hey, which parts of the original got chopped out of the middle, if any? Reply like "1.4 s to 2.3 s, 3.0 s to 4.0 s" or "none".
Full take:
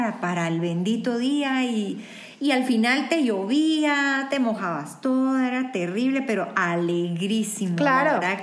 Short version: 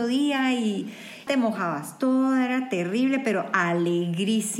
2.4 s to 4.3 s